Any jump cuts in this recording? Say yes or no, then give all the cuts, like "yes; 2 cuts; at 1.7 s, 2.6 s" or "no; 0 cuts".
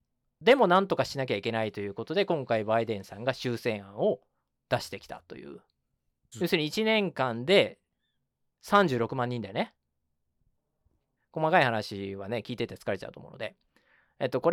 yes; 2 cuts; at 6.3 s, 11.2 s